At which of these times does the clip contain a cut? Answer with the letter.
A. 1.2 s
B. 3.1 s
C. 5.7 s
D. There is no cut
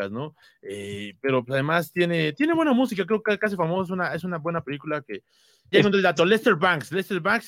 C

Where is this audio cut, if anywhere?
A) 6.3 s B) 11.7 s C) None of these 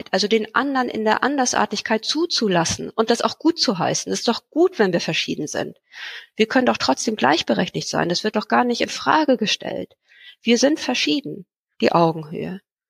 B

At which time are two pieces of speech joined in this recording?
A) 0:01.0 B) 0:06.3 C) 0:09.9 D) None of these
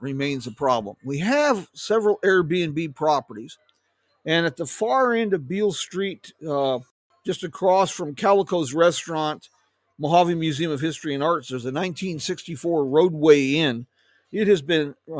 D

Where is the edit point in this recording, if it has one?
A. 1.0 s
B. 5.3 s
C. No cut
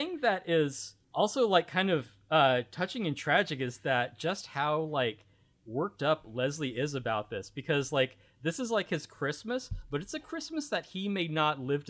A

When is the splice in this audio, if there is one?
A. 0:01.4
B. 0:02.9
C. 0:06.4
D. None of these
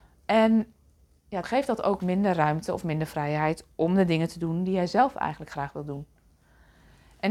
A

